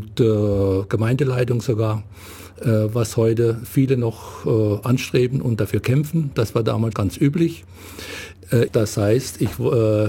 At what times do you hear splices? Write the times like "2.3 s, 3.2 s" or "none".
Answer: 6.9 s, 8.7 s